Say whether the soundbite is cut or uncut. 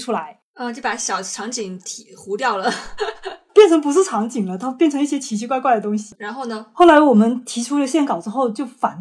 cut